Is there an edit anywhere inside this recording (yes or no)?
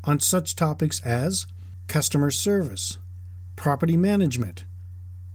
no